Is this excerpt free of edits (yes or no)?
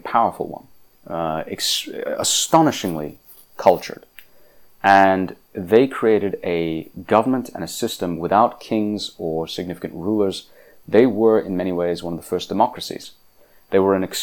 no